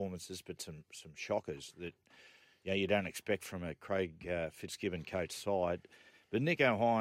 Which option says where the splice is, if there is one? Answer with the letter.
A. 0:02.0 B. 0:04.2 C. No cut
C